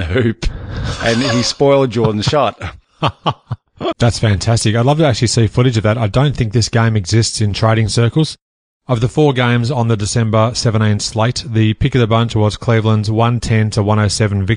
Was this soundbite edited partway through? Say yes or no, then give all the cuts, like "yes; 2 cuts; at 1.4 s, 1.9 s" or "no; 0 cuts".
yes; 1 cut; at 3.9 s